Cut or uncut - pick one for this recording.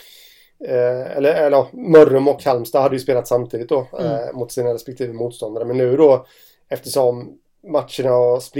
uncut